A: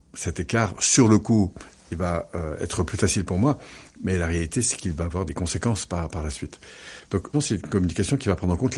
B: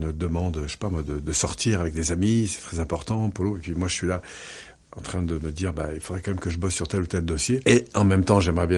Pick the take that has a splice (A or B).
A